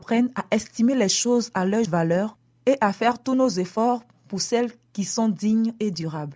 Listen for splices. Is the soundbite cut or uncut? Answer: cut